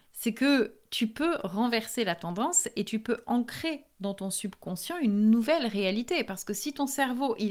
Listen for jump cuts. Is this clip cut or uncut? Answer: uncut